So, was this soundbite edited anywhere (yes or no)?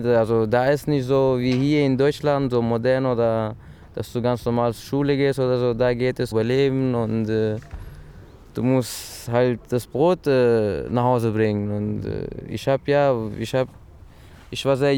yes